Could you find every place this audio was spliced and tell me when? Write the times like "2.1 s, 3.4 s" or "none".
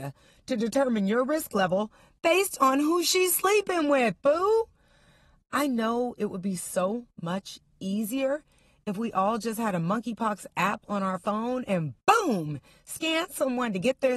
none